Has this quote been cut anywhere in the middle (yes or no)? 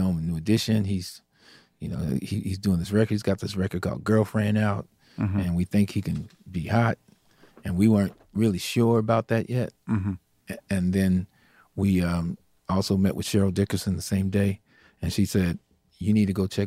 no